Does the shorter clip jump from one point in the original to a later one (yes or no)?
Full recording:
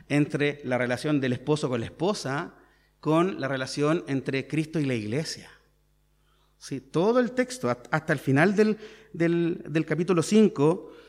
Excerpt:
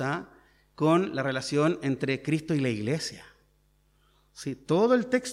no